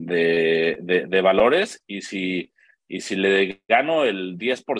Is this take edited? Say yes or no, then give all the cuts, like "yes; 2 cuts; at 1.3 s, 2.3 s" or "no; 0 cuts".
no; 0 cuts